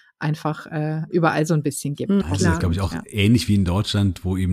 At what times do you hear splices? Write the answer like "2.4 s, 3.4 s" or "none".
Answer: 2.2 s